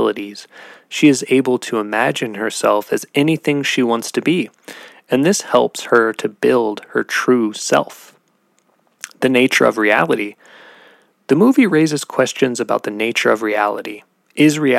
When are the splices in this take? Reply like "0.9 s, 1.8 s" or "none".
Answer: none